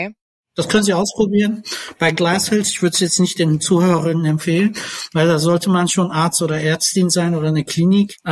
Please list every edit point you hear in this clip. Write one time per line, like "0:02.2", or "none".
none